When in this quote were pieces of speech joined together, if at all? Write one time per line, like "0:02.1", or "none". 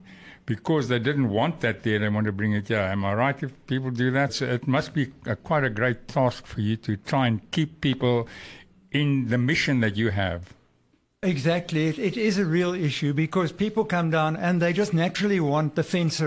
0:04.3

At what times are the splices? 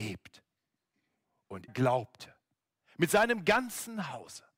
0:01.7

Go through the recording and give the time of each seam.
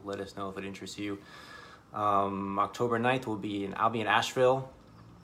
none

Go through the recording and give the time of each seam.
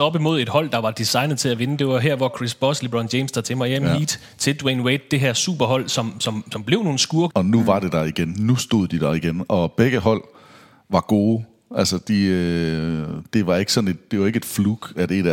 0:07.3

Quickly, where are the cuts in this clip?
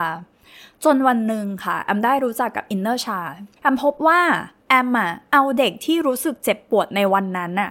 0:03.6

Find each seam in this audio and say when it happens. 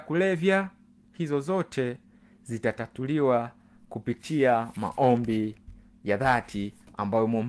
none

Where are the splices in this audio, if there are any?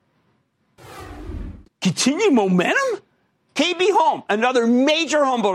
0:01.6
0:03.5

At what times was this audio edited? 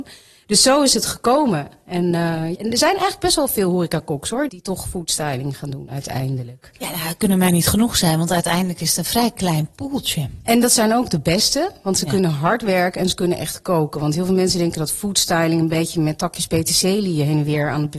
0:02.6
0:04.5

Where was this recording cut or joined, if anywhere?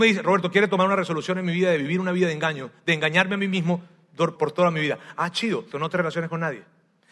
0:04.4
0:05.7

